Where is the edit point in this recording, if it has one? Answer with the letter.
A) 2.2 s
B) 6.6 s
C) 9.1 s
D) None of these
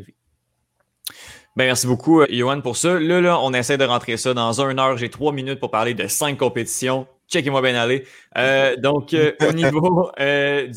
A